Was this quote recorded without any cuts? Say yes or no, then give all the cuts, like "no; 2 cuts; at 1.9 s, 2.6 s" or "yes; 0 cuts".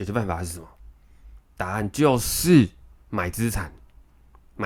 no; 1 cut; at 3.0 s